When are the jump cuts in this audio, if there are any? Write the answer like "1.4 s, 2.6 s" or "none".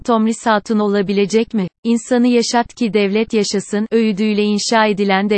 1.8 s